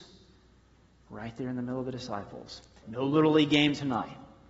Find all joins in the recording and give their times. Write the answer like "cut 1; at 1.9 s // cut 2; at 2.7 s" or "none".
cut 1; at 2.8 s